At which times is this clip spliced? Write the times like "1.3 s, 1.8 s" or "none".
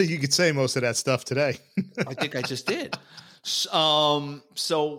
none